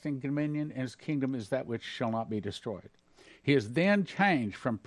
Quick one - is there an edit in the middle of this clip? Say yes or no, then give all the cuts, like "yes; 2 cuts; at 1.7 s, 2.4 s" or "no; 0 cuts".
no; 0 cuts